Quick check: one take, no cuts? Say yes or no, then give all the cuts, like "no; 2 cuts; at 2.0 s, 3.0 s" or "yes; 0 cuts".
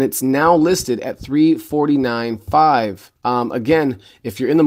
no; 1 cut; at 3.2 s